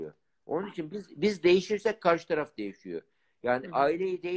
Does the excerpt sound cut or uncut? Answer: uncut